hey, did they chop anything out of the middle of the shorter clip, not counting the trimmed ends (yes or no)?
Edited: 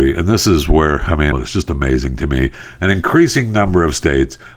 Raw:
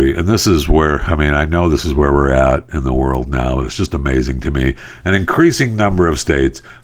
yes